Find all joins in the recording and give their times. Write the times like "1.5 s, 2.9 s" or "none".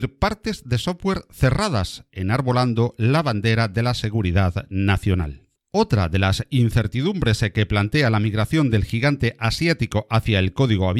5.6 s